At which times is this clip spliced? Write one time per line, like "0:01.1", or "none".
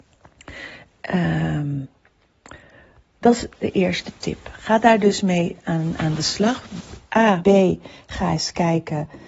0:07.4